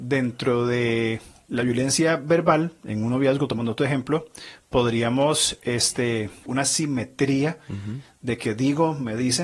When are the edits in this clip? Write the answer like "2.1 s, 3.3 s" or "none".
6.4 s